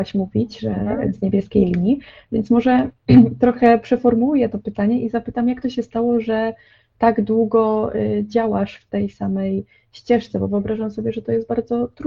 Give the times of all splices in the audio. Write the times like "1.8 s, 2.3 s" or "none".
none